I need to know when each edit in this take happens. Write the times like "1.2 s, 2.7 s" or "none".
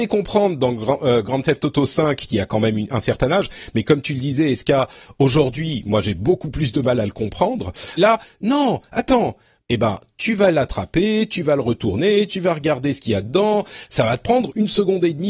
8.0 s, 9.6 s, 12.3 s